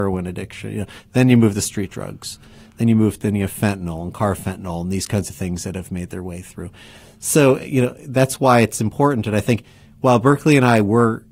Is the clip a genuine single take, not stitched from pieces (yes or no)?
yes